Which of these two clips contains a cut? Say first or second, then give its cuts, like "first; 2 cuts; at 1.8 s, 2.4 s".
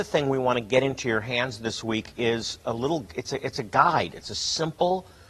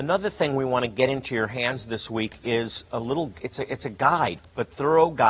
second; 1 cut; at 4.4 s